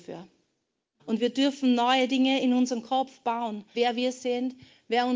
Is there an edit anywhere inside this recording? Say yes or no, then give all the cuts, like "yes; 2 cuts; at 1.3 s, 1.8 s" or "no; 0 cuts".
yes; 2 cuts; at 1.0 s, 3.7 s